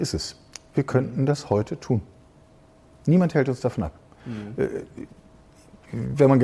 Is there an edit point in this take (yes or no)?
no